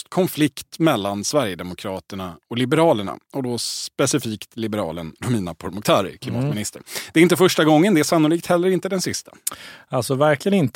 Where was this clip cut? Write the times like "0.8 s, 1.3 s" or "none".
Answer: none

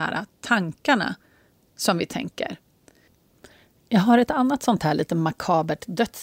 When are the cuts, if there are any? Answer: none

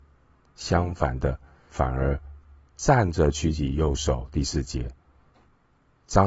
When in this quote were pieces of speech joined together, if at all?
1.7 s

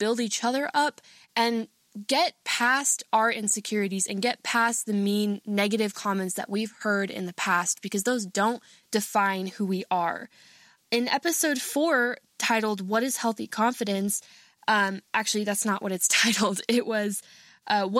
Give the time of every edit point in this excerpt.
none

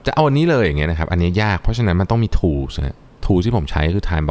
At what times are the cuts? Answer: none

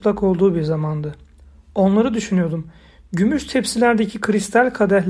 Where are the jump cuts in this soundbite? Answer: none

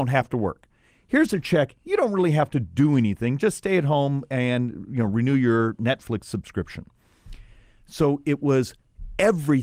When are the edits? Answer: none

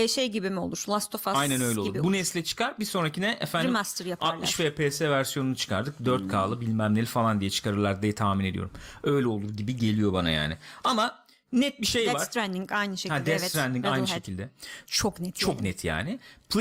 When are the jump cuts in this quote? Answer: 14.8 s

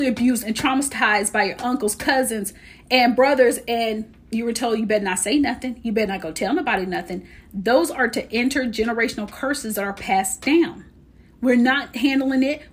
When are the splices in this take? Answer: none

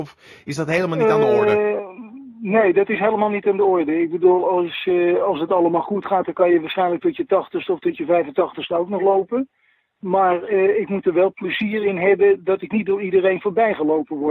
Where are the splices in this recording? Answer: none

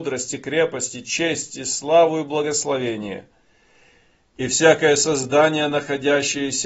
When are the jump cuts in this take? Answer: none

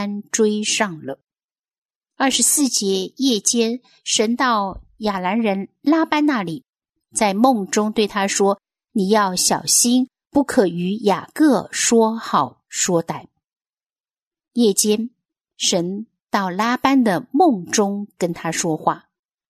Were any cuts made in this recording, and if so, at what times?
none

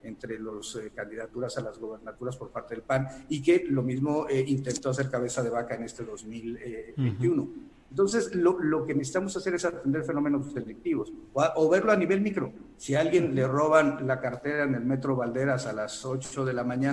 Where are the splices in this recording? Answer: none

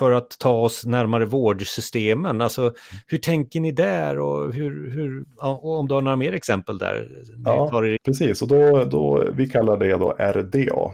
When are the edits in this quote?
5.2 s, 8.0 s

